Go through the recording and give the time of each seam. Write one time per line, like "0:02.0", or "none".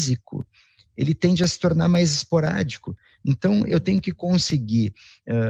none